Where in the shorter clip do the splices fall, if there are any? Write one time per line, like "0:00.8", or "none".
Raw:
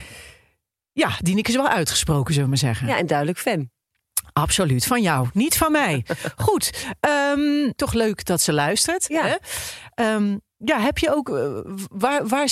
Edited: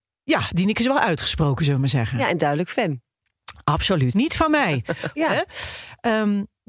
0:04.1
0:05.1